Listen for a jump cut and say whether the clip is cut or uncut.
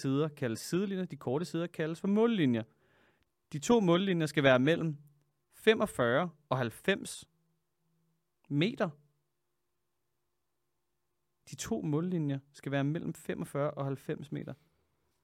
uncut